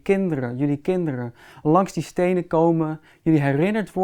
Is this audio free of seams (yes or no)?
yes